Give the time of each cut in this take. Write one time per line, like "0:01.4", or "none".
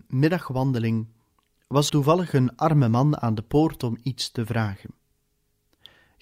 0:01.9